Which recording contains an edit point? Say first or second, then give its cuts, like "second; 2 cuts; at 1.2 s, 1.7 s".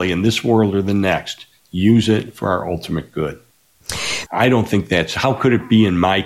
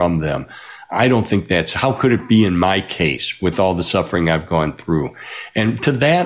first; 1 cut; at 4.3 s